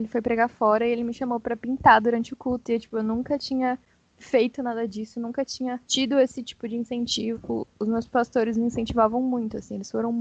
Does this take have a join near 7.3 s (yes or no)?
yes